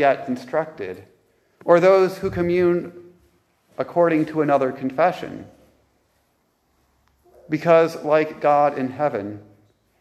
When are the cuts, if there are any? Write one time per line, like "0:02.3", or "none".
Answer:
none